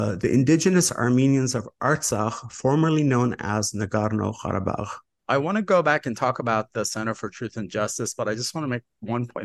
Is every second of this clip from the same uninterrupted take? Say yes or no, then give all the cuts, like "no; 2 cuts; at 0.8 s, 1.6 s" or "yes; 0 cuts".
yes; 0 cuts